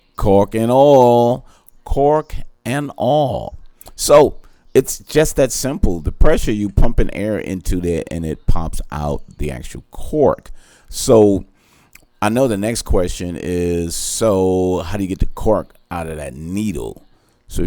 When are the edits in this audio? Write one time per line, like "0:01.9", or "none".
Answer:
none